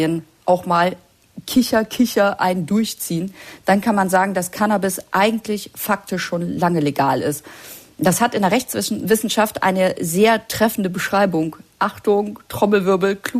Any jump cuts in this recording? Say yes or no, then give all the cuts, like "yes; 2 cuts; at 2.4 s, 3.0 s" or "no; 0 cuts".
no; 0 cuts